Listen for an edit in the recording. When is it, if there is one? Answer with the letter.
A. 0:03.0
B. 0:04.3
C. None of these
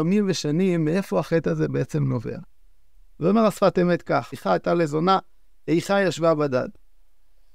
B